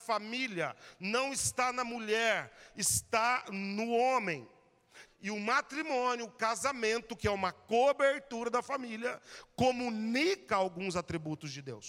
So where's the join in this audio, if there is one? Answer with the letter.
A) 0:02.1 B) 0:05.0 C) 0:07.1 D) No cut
B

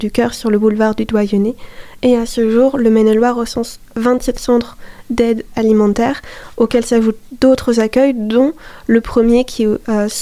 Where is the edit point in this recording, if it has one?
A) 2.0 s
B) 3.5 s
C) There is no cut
A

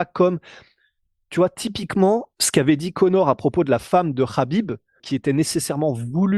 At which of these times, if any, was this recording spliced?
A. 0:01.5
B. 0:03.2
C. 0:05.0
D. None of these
C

